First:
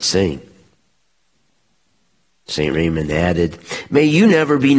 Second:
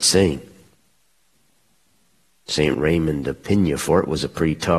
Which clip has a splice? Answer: second; 1 cut; at 2.7 s

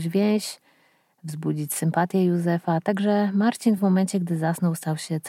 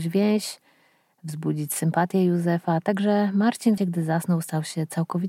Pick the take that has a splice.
second; 1 cut; at 3.8 s

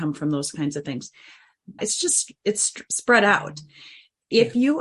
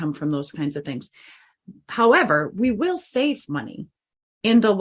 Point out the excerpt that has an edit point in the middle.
first; 1 cut; at 1.8 s

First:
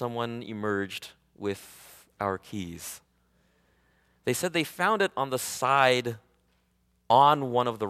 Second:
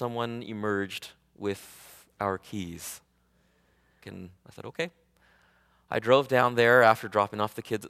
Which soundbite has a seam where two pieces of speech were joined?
second; 1 cut; at 4.0 s

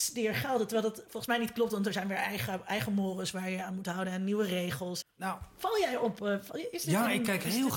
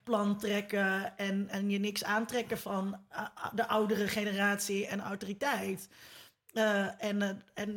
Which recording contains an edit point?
first; 1 cut; at 5.0 s

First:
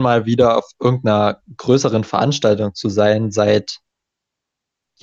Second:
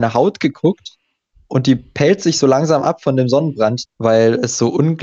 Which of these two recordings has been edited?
second; 1 cut; at 3.8 s

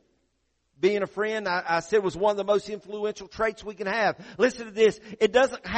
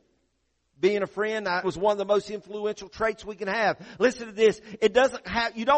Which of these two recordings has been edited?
second; 1 cut; at 1.6 s

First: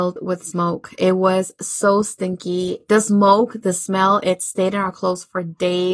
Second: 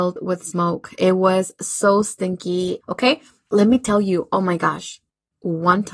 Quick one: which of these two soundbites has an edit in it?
second; 1 cut; at 2.8 s

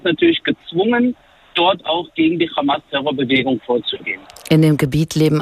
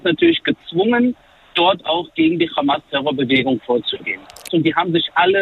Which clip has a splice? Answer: second; 1 cut; at 4.5 s

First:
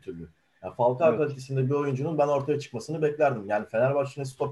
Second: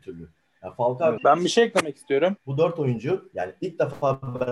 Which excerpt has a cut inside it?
second; 2 cuts; at 1.2 s, 2.4 s

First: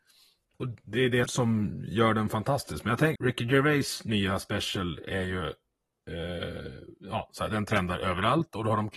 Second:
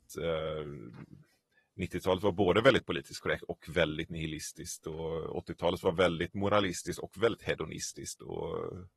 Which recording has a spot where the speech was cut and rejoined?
first; 2 cuts; at 1.3 s, 3.2 s

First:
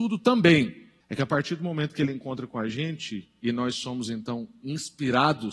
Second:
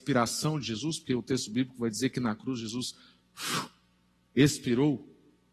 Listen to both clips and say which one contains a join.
first; 1 cut; at 1.0 s

